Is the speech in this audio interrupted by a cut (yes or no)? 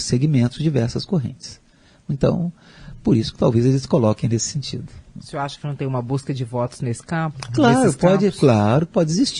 no